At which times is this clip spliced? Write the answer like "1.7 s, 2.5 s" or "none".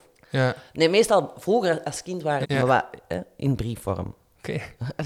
2.4 s